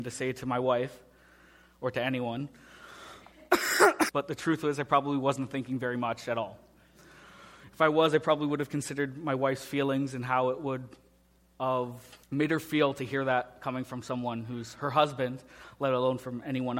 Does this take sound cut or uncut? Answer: cut